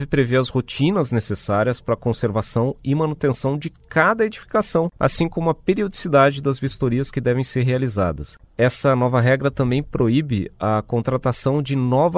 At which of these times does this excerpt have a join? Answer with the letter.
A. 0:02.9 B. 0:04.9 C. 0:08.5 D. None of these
D